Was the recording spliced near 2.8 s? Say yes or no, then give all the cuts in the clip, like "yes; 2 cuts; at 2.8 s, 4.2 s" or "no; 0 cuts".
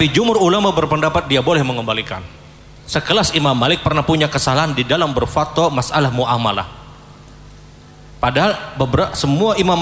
yes; 1 cut; at 2.8 s